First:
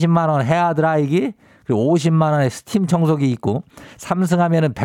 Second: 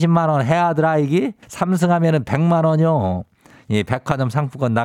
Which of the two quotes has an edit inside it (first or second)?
second